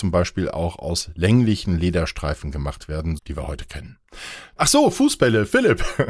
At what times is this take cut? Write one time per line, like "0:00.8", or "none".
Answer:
0:03.2
0:04.6

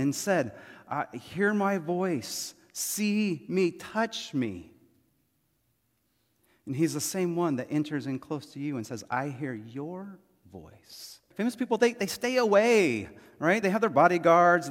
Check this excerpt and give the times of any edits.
0:11.3
0:13.6

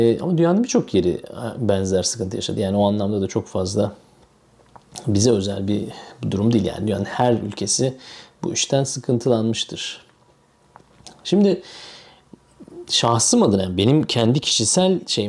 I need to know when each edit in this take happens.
none

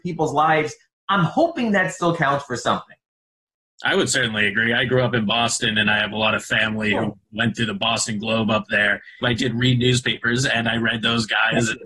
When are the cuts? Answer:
0:09.2

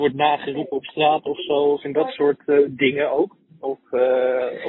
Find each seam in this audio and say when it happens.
none

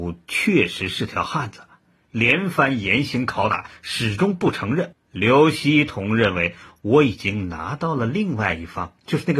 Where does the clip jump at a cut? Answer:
0:04.9

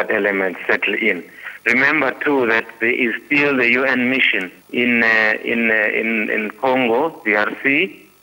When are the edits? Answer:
0:01.6
0:04.6

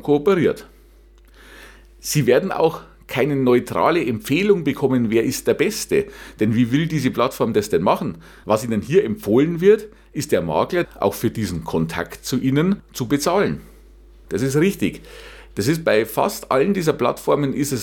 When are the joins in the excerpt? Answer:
0:08.4
0:10.8
0:14.2

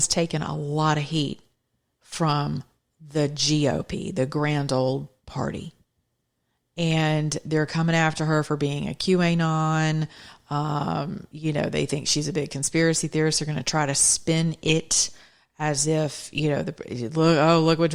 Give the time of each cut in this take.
none

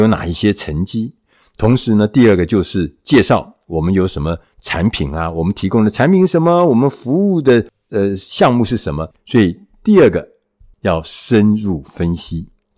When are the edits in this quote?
0:09.1
0:10.7

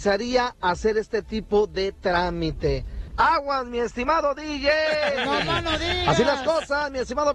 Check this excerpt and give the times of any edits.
0:03.1

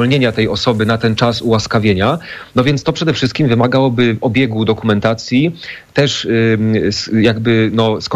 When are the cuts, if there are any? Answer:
none

